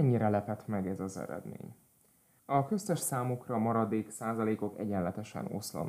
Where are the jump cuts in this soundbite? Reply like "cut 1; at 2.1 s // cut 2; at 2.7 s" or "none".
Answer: cut 1; at 2.4 s